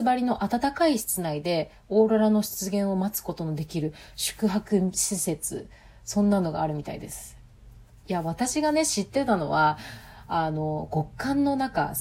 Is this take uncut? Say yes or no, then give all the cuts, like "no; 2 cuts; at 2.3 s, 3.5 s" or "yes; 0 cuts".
yes; 0 cuts